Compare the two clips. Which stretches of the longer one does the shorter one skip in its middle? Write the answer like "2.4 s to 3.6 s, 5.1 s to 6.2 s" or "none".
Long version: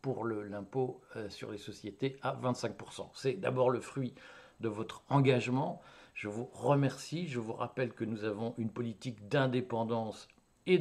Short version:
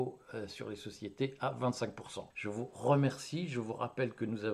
3.1 s to 6.1 s